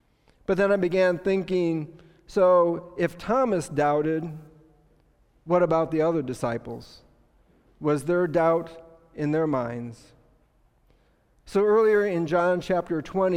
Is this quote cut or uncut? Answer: uncut